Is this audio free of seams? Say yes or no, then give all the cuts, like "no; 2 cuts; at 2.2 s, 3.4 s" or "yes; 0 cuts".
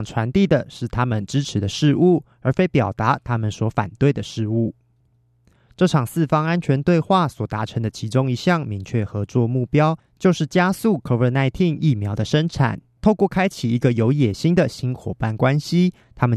no; 1 cut; at 13.0 s